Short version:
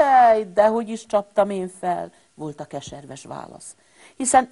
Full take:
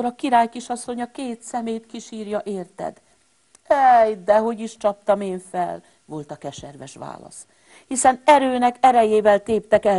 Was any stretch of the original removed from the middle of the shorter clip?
no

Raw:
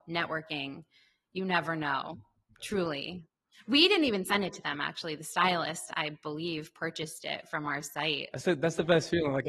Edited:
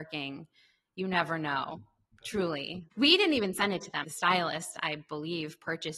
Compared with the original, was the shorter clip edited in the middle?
yes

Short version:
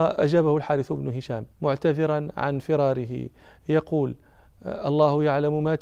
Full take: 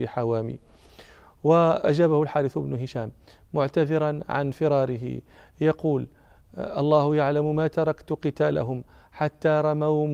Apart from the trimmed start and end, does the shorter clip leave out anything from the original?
yes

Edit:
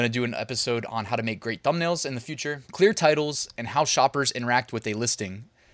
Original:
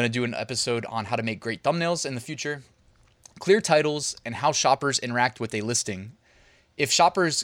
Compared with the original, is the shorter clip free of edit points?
no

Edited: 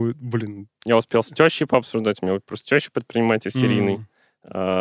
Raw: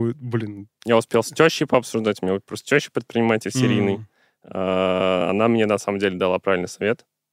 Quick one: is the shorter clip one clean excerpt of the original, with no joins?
yes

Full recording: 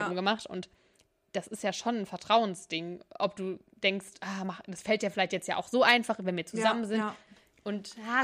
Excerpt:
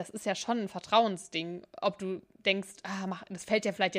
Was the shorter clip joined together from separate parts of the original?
no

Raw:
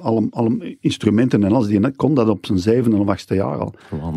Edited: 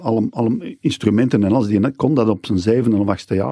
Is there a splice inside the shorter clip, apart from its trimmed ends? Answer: no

